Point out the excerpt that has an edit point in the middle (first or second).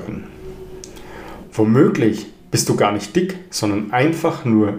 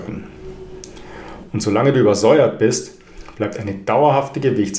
second